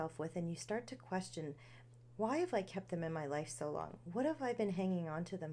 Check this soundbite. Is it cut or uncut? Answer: uncut